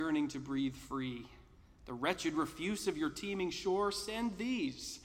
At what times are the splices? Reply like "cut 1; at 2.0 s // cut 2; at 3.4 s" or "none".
none